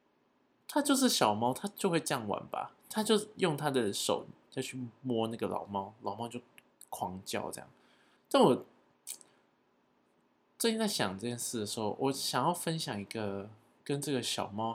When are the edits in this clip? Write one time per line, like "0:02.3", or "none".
0:08.2